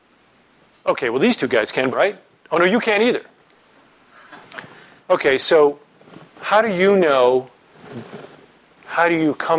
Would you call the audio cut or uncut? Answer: cut